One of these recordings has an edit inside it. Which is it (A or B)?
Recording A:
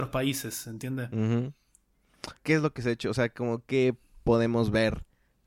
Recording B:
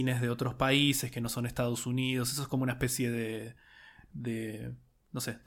A